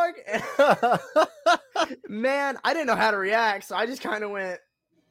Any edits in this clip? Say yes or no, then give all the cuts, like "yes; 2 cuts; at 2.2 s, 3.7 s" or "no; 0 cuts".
no; 0 cuts